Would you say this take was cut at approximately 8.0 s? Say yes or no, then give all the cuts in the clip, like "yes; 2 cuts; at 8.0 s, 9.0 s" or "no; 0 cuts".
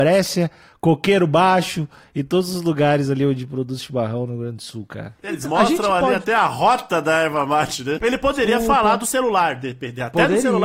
yes; 1 cut; at 8.0 s